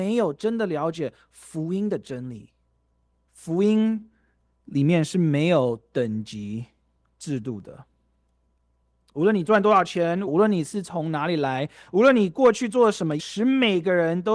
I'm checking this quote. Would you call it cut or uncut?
cut